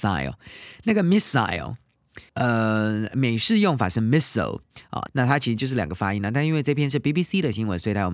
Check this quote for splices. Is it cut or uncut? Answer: cut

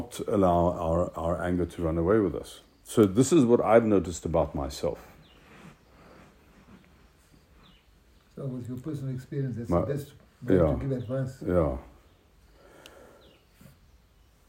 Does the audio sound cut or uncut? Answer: uncut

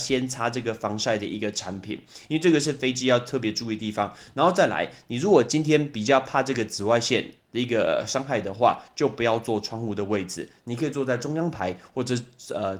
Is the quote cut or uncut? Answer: uncut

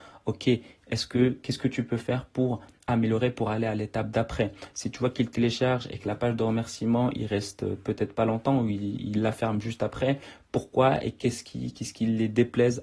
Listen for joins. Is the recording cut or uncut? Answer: uncut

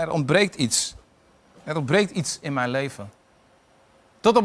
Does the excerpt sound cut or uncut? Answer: uncut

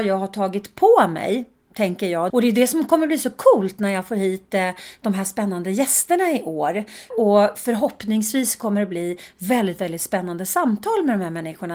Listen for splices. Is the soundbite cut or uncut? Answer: cut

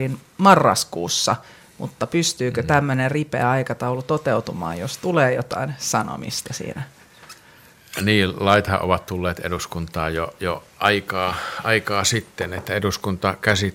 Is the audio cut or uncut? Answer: uncut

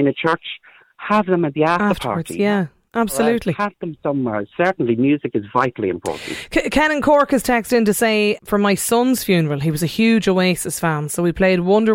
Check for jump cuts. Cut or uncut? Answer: cut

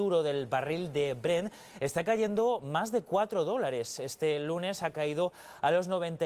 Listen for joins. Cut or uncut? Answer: uncut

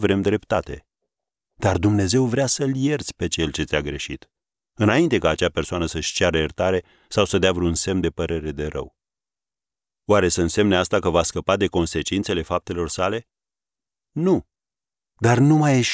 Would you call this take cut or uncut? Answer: uncut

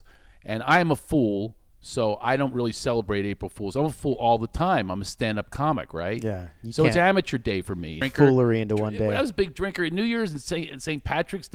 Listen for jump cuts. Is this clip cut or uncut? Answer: cut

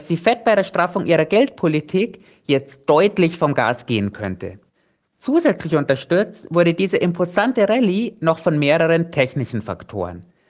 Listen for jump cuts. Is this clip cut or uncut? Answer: uncut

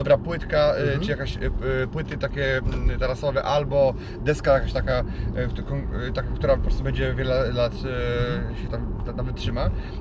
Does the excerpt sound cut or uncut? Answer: uncut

